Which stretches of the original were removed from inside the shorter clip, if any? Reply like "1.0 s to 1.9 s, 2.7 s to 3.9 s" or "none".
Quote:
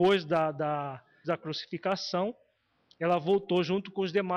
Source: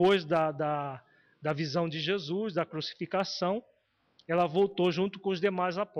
1.2 s to 2.5 s